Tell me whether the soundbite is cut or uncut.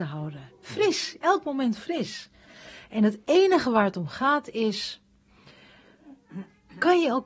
uncut